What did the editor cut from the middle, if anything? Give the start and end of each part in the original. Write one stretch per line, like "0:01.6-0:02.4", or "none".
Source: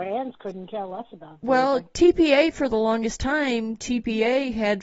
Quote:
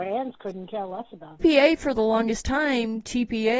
0:01.4-0:02.1